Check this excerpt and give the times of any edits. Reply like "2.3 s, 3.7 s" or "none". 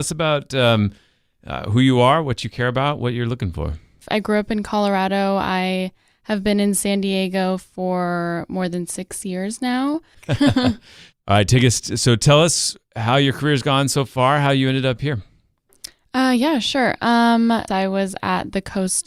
10.1 s, 17.7 s